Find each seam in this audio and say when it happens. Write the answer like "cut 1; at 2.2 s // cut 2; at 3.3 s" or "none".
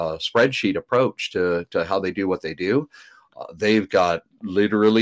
none